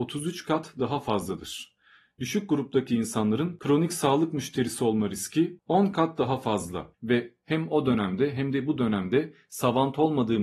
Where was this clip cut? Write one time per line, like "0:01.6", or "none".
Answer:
0:06.9

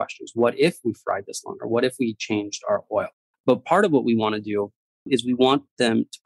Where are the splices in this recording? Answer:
0:03.3

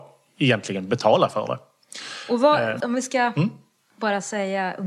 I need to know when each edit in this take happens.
0:02.8

